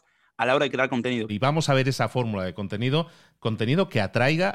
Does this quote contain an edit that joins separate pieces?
yes; 1 cut; at 1.3 s

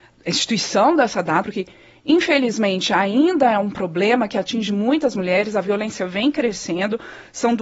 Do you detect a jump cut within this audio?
yes; 1 cut; at 1.4 s

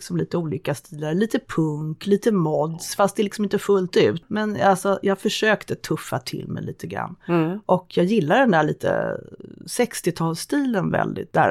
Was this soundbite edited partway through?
no; 0 cuts

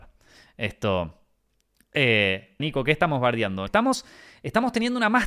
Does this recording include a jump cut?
yes; 2 cuts; at 2.6 s, 3.7 s

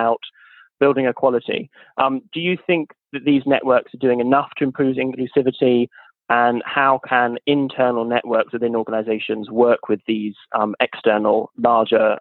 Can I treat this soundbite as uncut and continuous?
yes; 0 cuts

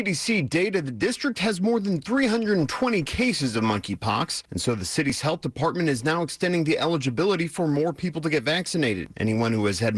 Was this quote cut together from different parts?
no; 0 cuts

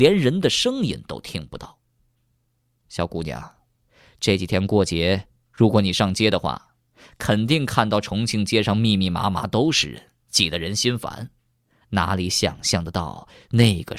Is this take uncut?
yes; 0 cuts

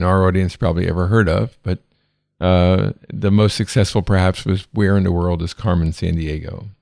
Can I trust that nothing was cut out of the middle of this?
yes; 0 cuts

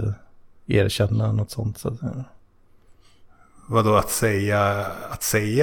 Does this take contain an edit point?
no; 0 cuts

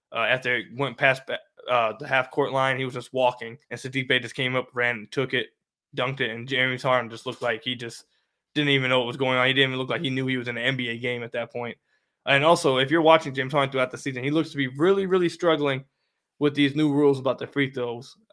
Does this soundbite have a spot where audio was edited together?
yes; 1 cut; at 3.6 s

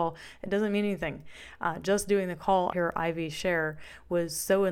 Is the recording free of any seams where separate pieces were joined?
no; 1 cut; at 2.7 s

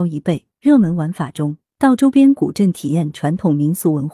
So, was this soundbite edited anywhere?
no; 0 cuts

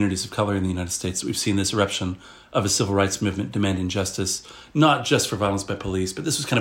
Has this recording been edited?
no; 0 cuts

